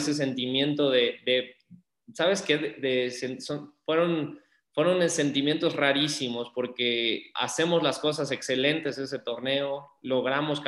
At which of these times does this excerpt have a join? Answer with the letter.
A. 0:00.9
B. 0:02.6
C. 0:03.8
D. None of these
D